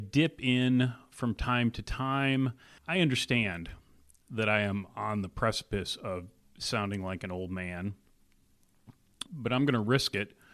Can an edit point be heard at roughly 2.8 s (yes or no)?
yes